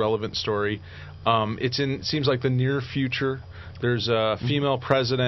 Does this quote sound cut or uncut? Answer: uncut